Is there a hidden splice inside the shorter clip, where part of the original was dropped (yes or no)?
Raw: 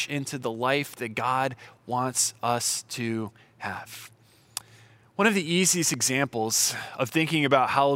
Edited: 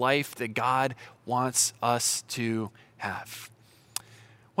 no